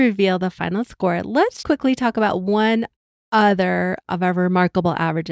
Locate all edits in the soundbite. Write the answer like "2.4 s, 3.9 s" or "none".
1.6 s, 4.0 s